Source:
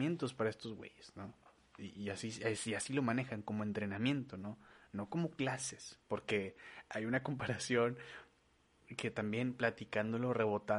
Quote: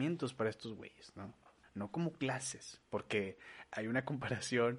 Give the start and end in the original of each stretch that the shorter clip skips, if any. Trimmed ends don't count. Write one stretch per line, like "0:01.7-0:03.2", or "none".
0:01.6-0:04.8